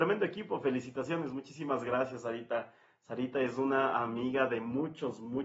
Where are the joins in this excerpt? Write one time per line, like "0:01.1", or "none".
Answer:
none